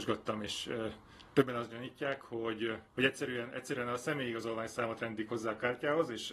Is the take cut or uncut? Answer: cut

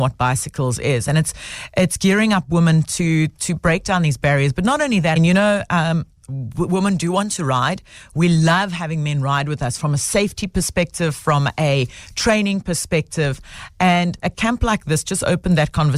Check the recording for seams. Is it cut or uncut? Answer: cut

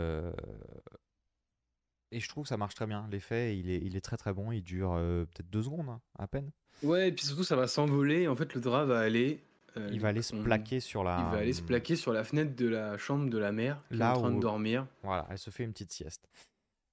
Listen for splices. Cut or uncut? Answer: uncut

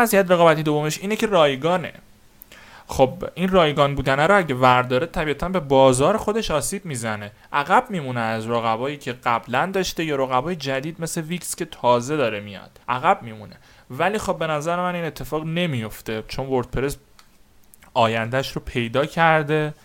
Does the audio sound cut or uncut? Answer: cut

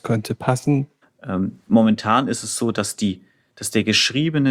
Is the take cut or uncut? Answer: cut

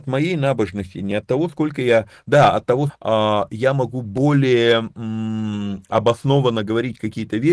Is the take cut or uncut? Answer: cut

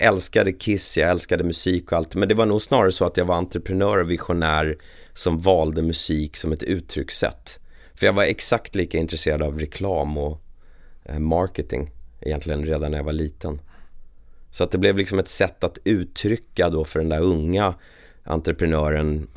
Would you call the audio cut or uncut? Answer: uncut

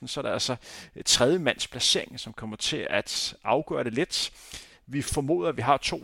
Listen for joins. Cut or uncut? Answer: uncut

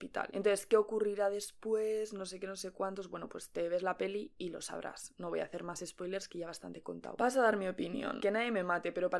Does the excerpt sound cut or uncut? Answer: uncut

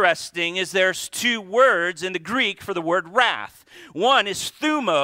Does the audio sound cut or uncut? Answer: uncut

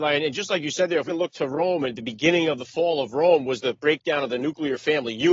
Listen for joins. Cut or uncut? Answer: cut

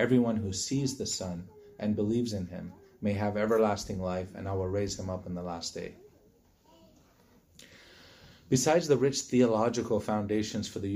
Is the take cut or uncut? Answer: uncut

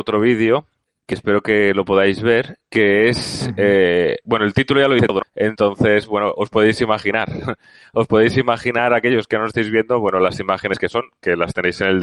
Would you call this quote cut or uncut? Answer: cut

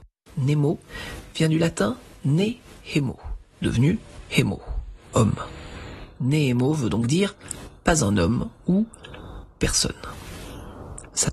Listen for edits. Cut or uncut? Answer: cut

